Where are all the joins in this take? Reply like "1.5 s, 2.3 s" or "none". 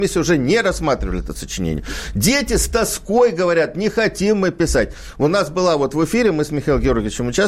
none

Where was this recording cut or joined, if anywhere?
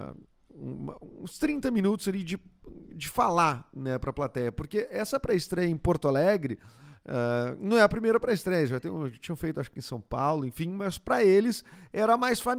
none

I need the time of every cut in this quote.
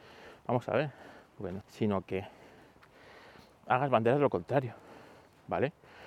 1.6 s

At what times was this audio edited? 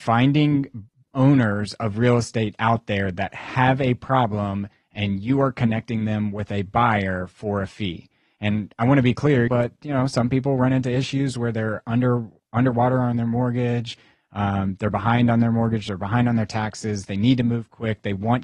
9.5 s

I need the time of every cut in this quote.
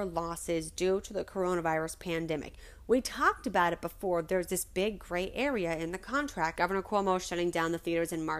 6.6 s

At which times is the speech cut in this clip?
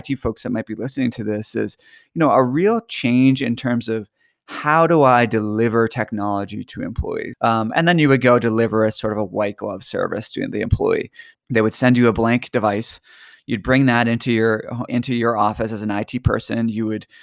7.3 s, 11.3 s, 14.9 s

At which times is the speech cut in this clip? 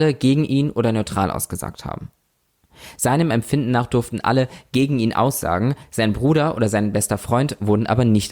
none

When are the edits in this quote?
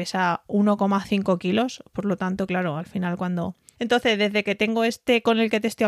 3.8 s

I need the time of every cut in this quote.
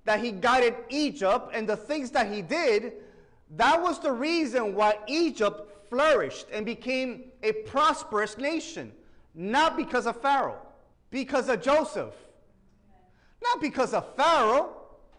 10.9 s

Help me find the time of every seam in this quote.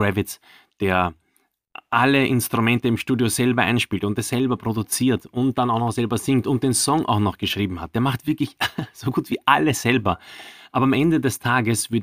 none

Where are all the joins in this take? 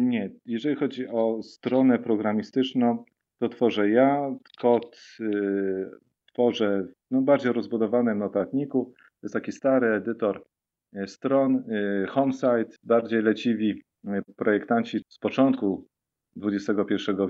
12.8 s, 15.0 s

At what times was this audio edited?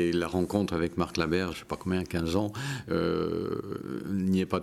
1.5 s

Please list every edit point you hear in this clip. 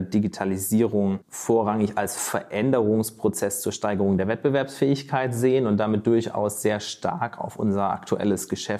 none

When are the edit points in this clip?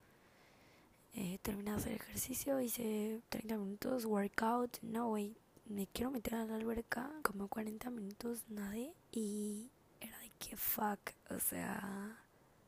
4.8 s, 7.2 s, 9.0 s

